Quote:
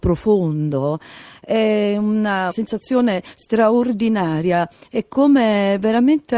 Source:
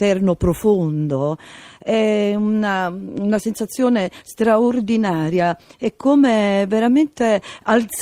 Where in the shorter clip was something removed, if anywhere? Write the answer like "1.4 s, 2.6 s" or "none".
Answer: 2.5 s